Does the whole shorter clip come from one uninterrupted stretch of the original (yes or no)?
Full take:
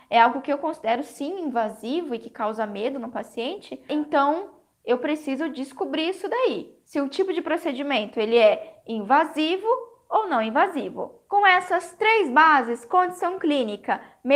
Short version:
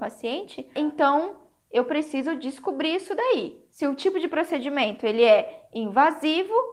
yes